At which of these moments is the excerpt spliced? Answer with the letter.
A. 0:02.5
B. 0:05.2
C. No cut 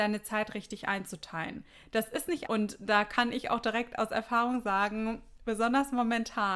A